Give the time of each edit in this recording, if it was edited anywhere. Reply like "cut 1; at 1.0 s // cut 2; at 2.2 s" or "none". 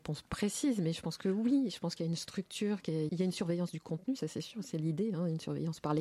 cut 1; at 3.1 s